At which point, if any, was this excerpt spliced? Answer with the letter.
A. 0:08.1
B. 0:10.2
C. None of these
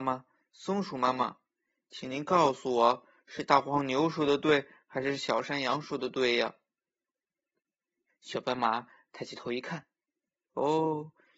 A